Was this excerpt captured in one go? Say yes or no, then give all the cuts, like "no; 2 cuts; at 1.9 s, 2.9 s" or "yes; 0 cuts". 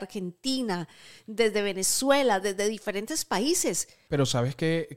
no; 1 cut; at 4.1 s